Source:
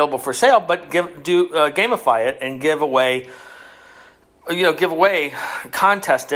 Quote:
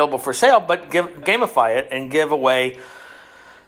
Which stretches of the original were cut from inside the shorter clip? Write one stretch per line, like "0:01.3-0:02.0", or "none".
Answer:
0:01.2-0:01.7